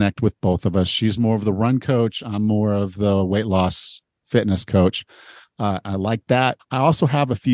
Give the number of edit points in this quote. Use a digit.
2